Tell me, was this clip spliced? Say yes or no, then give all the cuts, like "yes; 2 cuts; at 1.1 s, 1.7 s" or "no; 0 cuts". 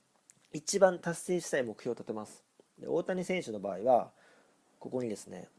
no; 0 cuts